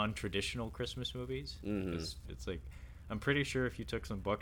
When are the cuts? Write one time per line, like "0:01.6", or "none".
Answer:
0:02.2

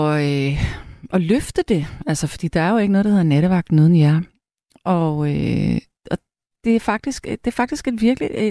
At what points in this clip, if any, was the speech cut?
0:06.0

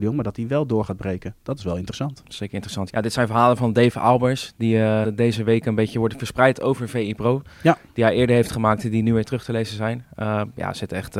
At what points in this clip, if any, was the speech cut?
0:02.9
0:05.0

